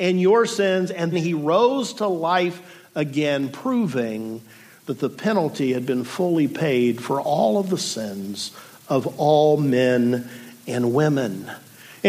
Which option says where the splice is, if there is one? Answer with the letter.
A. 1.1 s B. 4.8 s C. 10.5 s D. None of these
A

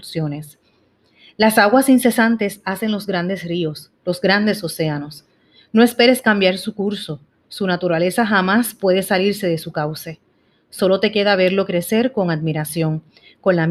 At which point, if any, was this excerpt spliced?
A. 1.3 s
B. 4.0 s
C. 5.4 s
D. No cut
B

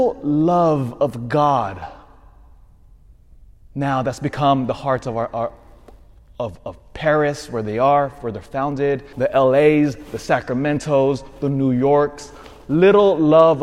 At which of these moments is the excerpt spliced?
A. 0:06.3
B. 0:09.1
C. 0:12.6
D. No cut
B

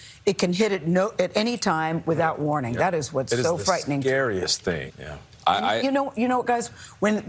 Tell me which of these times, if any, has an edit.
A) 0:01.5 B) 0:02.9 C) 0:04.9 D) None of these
C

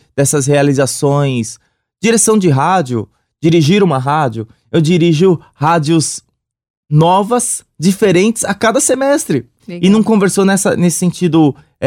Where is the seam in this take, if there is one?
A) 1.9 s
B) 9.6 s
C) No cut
B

